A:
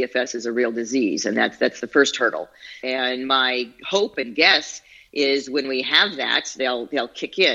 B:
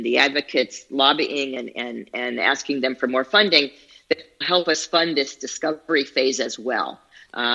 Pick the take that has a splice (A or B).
A